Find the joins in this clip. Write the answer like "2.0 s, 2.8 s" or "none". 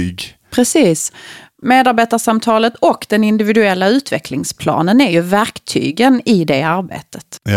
none